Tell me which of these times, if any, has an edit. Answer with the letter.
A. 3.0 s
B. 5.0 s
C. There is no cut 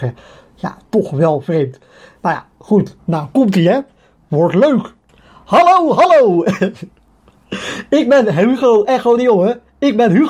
A